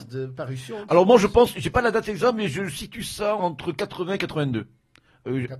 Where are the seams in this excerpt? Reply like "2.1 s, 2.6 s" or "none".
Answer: 3.4 s

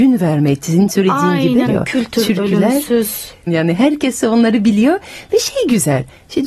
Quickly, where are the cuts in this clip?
1.7 s, 3.5 s

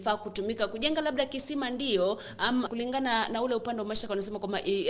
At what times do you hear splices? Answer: 2.7 s

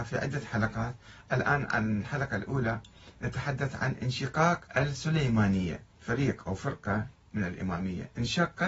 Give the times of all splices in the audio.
4.7 s, 5.9 s

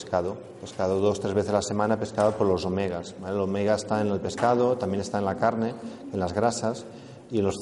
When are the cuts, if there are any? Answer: none

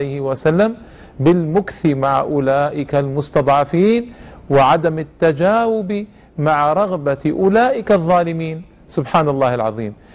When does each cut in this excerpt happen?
none

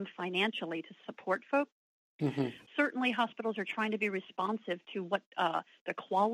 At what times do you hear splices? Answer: 2.7 s

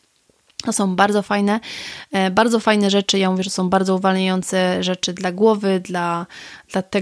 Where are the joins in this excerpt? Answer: none

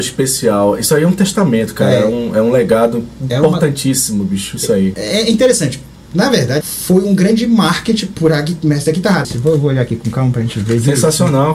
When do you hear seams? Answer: 4.9 s, 6.6 s, 9.2 s

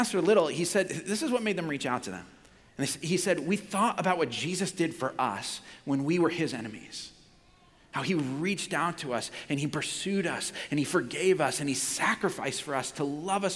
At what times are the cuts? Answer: 2.7 s

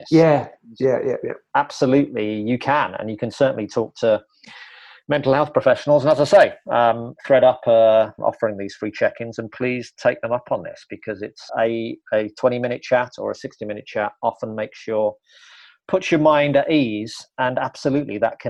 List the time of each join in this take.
8.2 s, 11.5 s

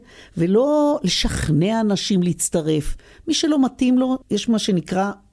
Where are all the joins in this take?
4.2 s

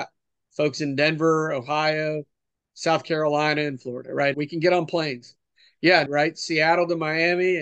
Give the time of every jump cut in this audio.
4.3 s, 6.1 s

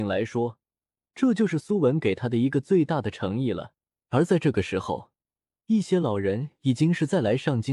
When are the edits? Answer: 0.9 s, 4.0 s

